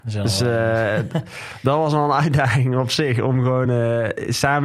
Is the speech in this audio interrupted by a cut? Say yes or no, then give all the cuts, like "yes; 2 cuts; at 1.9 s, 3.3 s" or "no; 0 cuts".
no; 0 cuts